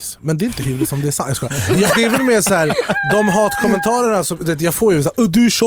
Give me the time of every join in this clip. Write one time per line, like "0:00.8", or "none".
0:01.9